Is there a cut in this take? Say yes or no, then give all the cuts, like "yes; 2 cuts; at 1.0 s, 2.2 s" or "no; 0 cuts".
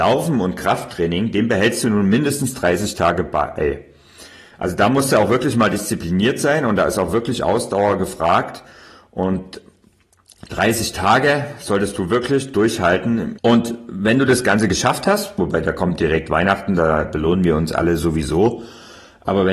yes; 2 cuts; at 13.4 s, 15.4 s